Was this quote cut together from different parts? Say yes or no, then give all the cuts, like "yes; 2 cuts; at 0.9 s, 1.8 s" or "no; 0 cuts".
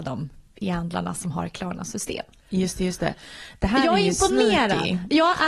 no; 0 cuts